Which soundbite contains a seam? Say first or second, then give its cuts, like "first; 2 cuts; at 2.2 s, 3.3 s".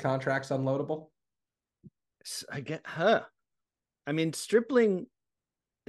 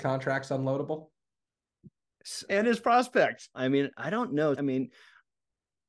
second; 3 cuts; at 2.5 s, 3.5 s, 4.6 s